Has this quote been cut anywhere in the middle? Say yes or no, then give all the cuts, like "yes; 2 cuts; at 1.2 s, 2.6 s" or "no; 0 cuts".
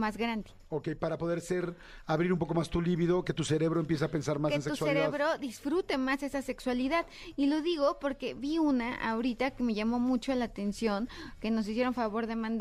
no; 0 cuts